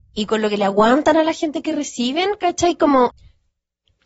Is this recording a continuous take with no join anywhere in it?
no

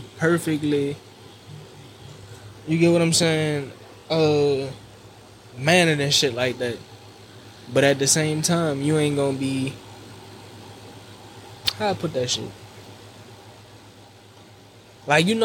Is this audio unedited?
yes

